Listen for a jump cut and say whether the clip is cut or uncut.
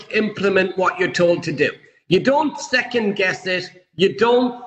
uncut